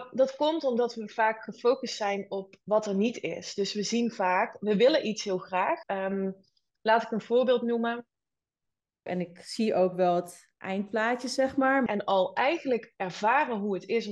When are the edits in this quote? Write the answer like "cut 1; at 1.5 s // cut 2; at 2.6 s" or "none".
cut 1; at 5.8 s // cut 2; at 9.1 s // cut 3; at 11.9 s